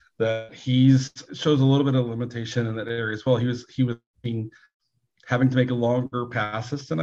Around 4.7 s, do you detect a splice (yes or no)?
no